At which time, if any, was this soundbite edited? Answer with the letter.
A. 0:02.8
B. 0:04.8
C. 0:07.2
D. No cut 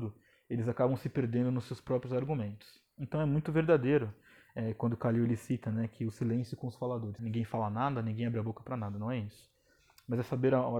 C